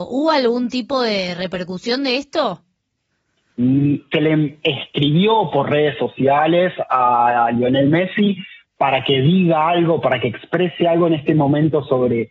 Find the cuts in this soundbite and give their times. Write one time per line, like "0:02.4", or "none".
0:04.1